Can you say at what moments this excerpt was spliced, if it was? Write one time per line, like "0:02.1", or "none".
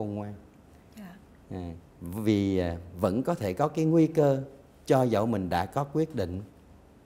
0:01.9